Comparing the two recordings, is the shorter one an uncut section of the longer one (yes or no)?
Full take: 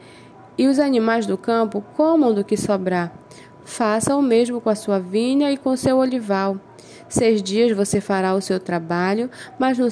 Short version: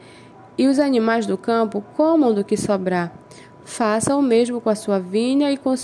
yes